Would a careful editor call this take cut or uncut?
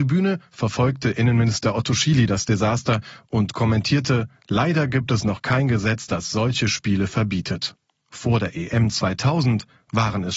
cut